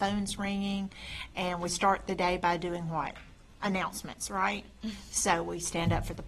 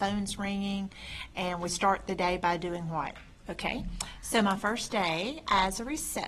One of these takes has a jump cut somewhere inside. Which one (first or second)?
second